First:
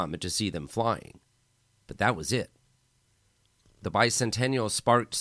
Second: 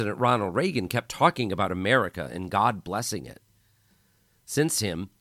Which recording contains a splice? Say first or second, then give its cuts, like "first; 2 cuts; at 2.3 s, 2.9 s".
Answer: first; 1 cut; at 1.8 s